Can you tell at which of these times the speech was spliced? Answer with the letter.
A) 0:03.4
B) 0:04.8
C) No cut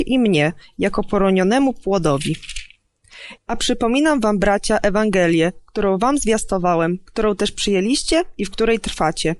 A